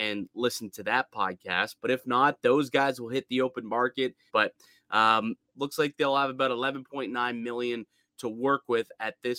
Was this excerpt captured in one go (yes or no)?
no